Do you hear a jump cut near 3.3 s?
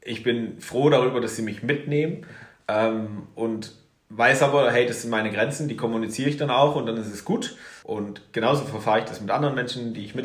no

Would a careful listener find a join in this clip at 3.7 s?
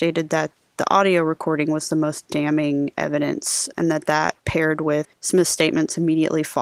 yes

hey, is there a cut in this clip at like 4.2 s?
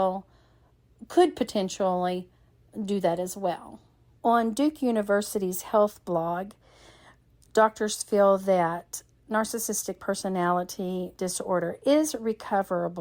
yes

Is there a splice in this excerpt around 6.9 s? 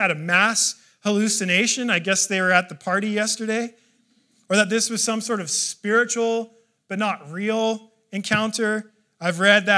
no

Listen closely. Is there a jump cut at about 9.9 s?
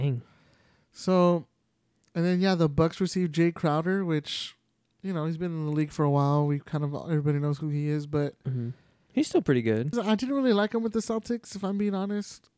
yes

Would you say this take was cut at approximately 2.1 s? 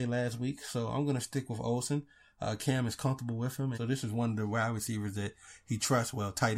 no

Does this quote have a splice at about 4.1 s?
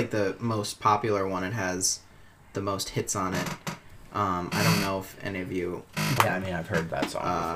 no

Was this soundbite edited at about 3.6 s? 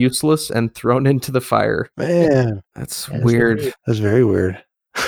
no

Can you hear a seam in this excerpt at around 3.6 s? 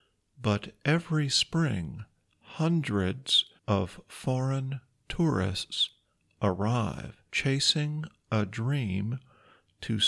yes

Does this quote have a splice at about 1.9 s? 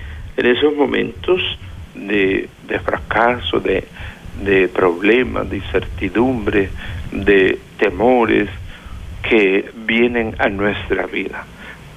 no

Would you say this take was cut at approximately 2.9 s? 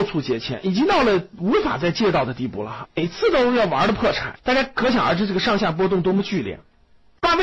yes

